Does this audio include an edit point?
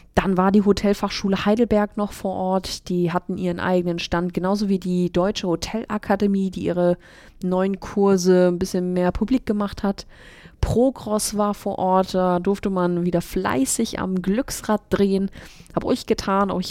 no; 0 cuts

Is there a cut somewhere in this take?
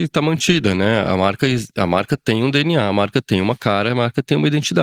no; 0 cuts

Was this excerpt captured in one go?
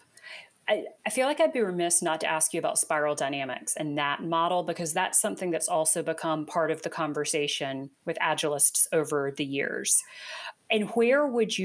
no; 1 cut; at 1.0 s

